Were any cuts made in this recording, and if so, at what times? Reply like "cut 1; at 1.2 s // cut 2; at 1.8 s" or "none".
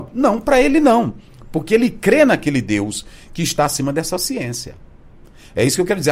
none